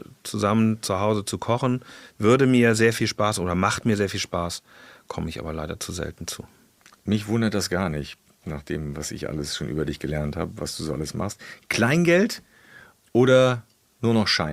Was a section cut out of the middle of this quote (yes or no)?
no